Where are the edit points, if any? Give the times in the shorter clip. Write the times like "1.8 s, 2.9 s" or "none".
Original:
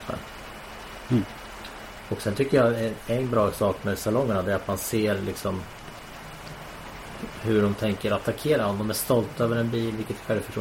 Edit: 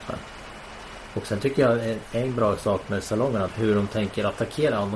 1.1 s, 3.5 s